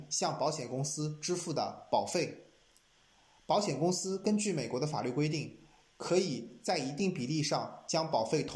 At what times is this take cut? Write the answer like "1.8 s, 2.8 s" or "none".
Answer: none